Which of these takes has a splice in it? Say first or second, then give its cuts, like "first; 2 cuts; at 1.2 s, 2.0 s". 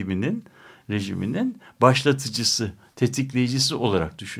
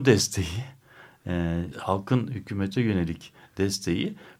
second; 1 cut; at 1.7 s